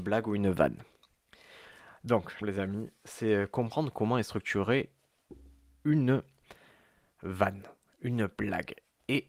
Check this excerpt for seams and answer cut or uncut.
cut